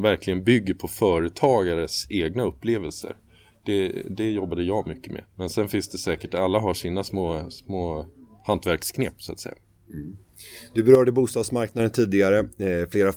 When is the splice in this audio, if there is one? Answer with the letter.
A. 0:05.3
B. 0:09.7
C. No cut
A